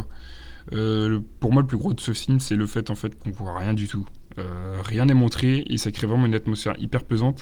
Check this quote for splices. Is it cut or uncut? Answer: uncut